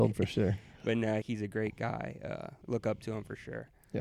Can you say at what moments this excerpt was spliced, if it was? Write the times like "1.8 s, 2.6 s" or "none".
1.2 s, 2.6 s